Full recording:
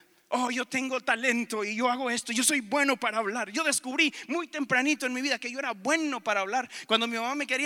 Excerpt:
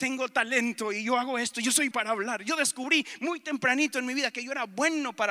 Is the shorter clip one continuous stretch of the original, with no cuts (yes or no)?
no